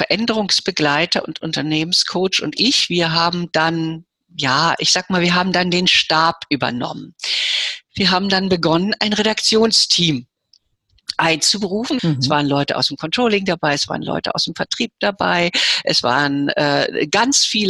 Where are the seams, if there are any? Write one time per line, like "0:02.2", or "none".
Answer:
0:12.0